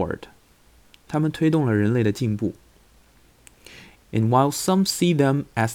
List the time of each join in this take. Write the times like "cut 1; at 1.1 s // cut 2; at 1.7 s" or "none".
none

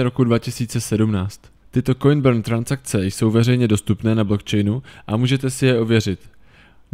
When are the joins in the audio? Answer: cut 1; at 1.6 s

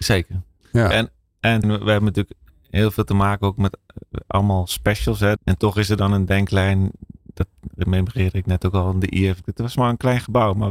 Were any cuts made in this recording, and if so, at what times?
cut 1; at 1.6 s // cut 2; at 5.4 s // cut 3; at 9.4 s

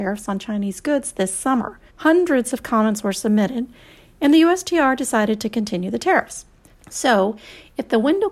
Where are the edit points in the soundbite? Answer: cut 1; at 1.9 s // cut 2; at 6.7 s

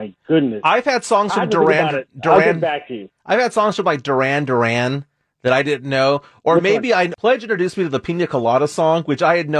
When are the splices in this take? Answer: cut 1; at 7.1 s

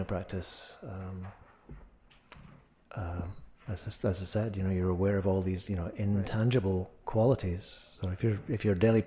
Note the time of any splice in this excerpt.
none

